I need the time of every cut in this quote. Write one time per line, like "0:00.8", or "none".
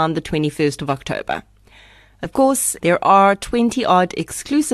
0:02.8